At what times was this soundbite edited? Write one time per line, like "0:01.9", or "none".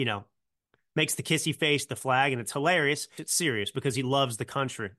0:03.2